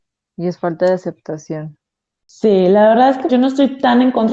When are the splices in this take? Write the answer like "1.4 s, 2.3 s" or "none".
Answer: 3.3 s